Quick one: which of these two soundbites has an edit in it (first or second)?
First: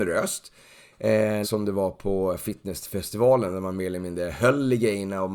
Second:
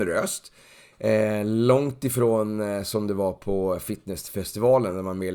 first